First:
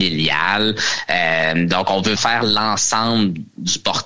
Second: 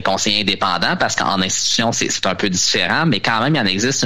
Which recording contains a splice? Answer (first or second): first